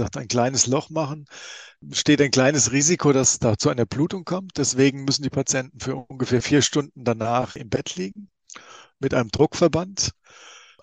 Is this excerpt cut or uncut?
uncut